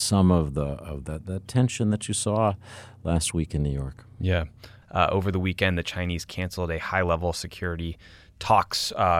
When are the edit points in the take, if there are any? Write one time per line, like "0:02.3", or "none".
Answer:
0:04.8